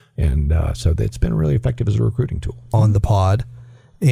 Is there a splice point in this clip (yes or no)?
yes